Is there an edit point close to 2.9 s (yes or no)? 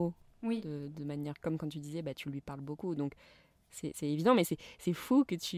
no